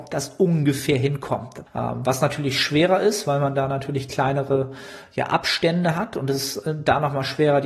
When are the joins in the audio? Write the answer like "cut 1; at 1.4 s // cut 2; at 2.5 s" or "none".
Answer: cut 1; at 1.7 s